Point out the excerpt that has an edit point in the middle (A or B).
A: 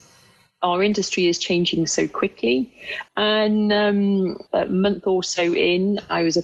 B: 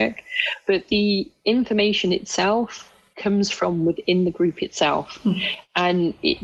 A